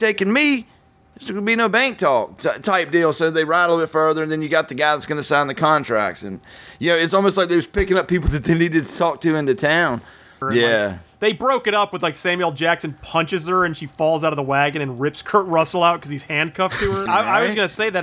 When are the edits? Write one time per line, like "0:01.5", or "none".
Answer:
0:10.4
0:17.1